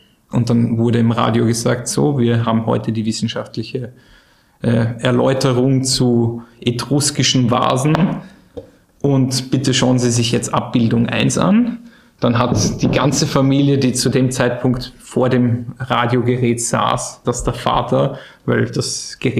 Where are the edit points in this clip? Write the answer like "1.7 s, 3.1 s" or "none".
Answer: 17.2 s